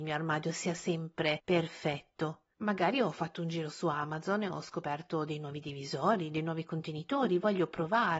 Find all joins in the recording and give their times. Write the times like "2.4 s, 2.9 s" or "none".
2.5 s